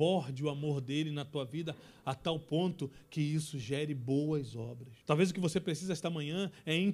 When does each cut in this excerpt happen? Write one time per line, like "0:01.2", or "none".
0:05.0